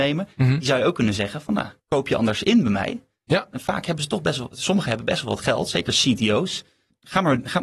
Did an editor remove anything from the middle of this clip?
yes; 1 cut; at 1.8 s

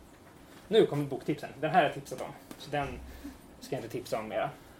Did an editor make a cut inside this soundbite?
no; 0 cuts

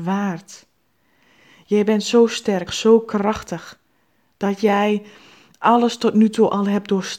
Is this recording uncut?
no; 1 cut; at 2.7 s

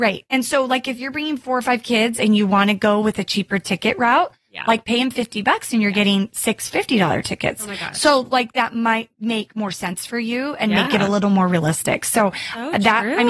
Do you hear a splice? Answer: no; 0 cuts

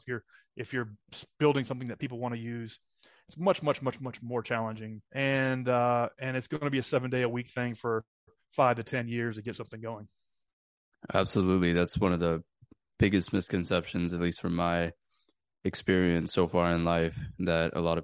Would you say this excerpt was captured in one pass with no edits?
no; 1 cut; at 5.1 s

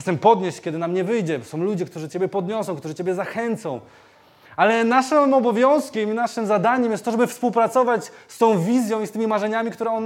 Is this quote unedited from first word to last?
yes; 0 cuts

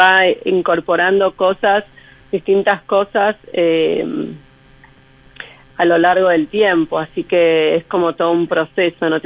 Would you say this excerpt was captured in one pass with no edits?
yes; 0 cuts

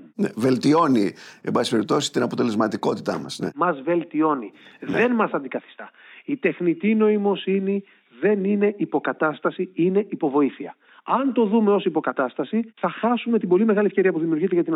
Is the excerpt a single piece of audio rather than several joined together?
yes; 0 cuts

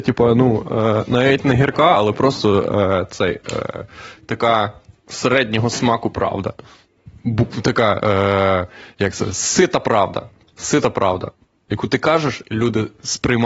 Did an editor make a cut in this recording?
no; 0 cuts

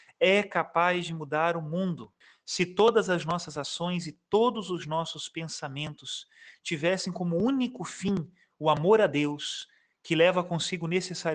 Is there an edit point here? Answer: no; 0 cuts

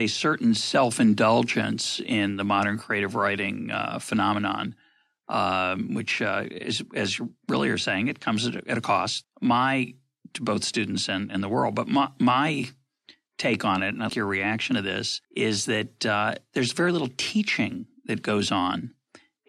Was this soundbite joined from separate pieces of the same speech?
yes; 3 cuts; at 9.2 s, 14.1 s, 15.2 s

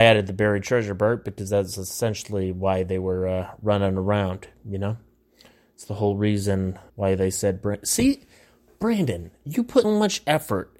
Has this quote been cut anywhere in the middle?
yes; 2 cuts; at 6.9 s, 9.8 s

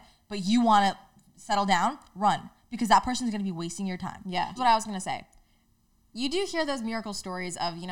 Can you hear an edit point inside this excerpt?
yes; 1 cut; at 4.6 s

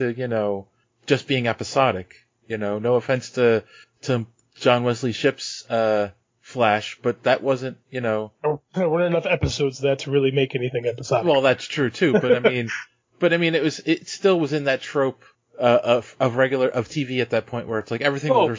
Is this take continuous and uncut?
yes; 0 cuts

